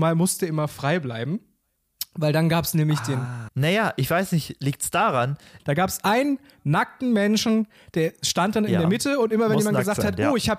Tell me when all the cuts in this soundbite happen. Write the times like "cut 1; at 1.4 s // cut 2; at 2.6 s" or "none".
cut 1; at 3.5 s // cut 2; at 5.6 s